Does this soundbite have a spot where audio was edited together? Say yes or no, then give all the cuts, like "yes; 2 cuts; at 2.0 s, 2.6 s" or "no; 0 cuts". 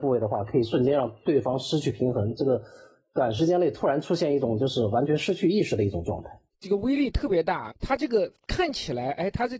yes; 2 cuts; at 6.5 s, 7.7 s